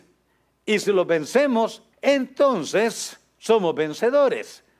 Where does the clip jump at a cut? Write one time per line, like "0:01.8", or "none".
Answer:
0:01.9